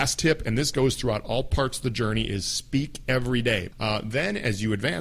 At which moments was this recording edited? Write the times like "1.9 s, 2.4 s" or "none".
3.7 s